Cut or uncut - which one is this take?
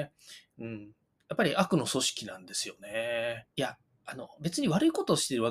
cut